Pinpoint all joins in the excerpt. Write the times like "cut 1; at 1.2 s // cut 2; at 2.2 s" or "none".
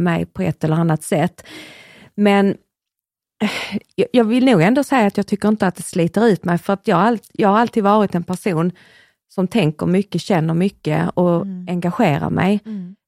none